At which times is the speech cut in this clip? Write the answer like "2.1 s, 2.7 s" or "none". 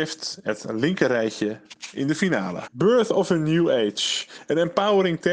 2.7 s